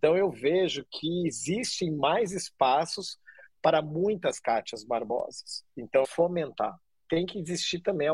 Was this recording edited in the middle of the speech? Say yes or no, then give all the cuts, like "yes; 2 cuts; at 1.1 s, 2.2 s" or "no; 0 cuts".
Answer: yes; 1 cut; at 6.0 s